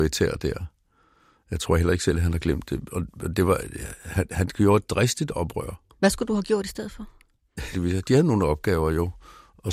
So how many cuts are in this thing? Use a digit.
1